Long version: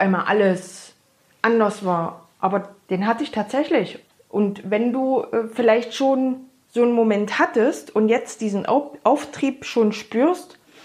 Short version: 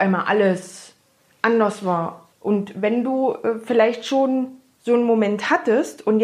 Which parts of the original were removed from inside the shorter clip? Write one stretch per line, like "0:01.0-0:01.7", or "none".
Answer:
0:02.3-0:04.2